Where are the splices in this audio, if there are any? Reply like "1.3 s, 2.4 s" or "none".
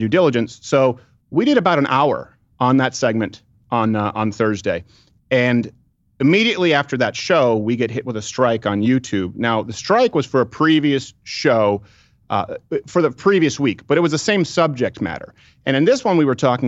none

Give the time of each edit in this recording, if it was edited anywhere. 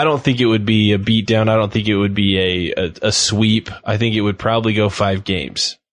none

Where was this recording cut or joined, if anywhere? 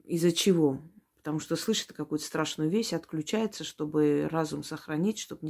none

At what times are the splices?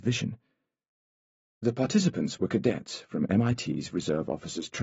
none

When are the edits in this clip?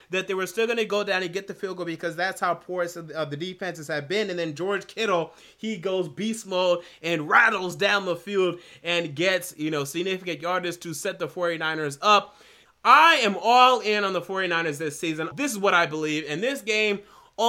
12.7 s, 15.3 s

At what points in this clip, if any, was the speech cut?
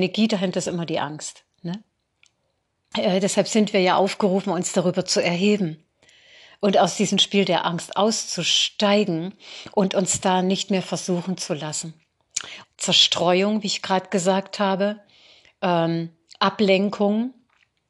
2.9 s, 12.6 s

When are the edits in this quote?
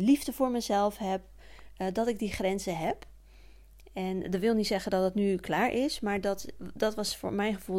none

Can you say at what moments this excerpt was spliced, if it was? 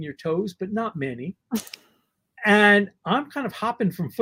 none

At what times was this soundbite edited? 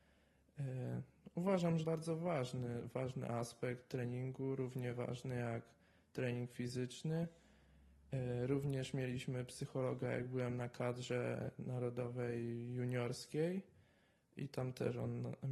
1.8 s, 14.5 s

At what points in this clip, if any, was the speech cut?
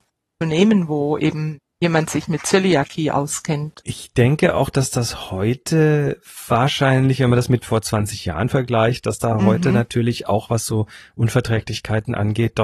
none

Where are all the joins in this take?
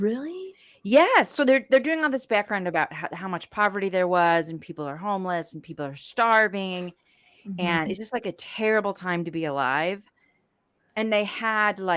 none

